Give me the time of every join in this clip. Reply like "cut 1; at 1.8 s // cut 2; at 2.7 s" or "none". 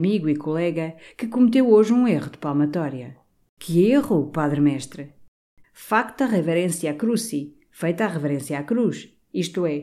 cut 1; at 3.5 s // cut 2; at 5.6 s